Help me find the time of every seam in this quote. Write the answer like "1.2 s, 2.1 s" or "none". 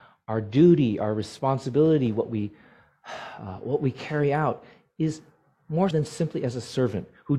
5.9 s